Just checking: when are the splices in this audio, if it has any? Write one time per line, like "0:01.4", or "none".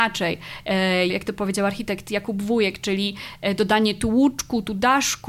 0:01.1